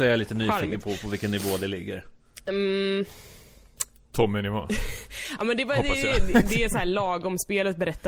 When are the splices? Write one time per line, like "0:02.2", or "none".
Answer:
none